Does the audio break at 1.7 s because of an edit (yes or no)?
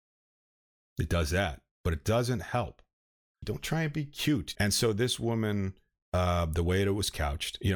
yes